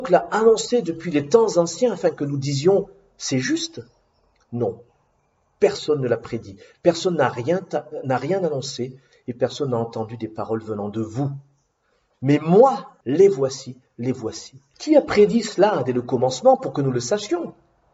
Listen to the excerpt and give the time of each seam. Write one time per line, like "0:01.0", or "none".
0:13.0
0:14.7